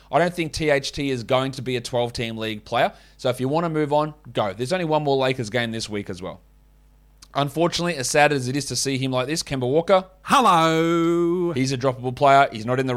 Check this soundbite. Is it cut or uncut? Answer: uncut